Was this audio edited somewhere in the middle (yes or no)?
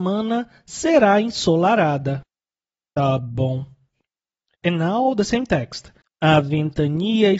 yes